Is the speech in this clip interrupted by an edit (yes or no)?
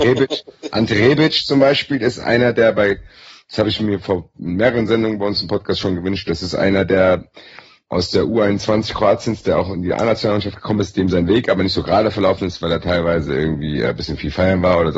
no